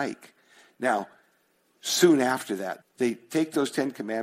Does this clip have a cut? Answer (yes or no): yes